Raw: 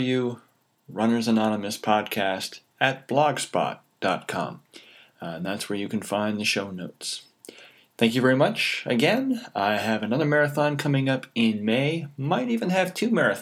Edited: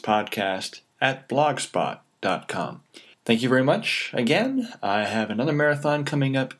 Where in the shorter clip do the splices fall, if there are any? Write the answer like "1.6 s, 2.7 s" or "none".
3.1 s